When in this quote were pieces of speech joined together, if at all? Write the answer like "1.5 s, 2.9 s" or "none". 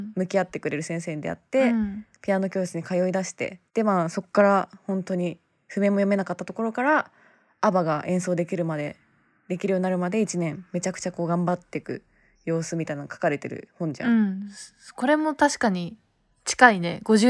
3.7 s